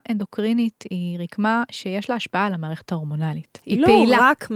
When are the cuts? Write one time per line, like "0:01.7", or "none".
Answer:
0:03.6